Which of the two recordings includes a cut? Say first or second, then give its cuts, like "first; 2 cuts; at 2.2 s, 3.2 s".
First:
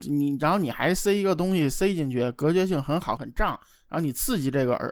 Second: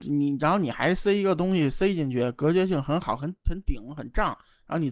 first; 1 cut; at 3.2 s